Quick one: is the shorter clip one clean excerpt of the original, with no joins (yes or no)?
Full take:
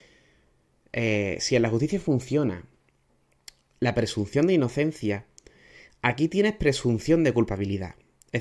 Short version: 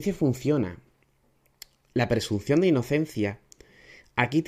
yes